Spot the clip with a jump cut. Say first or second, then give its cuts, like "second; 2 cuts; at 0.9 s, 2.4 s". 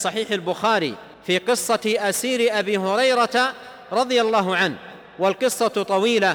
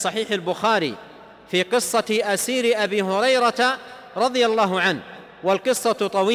first; 1 cut; at 1.1 s